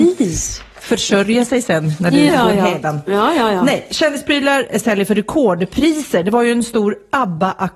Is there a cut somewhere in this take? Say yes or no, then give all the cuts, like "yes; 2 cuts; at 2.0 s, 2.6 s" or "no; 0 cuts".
yes; 1 cut; at 2.3 s